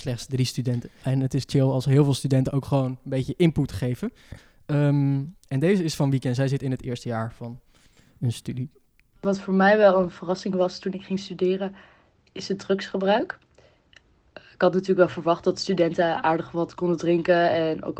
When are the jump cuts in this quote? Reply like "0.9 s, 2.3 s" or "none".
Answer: none